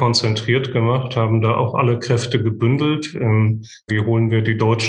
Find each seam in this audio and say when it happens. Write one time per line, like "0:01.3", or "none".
0:03.9